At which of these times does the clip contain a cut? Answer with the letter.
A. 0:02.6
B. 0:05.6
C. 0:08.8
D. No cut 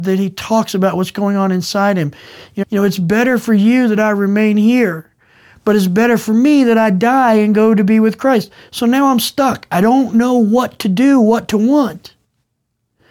A